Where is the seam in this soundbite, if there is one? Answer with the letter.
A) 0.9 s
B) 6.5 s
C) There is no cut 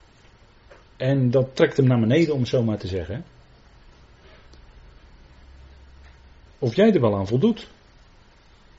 B